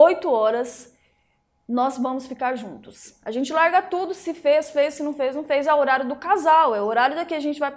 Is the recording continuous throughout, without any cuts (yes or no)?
yes